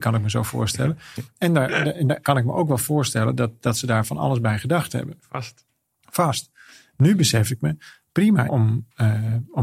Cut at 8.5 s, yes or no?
yes